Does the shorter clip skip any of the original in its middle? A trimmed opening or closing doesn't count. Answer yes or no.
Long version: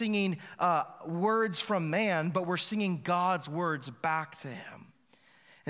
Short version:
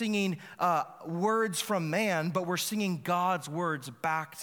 no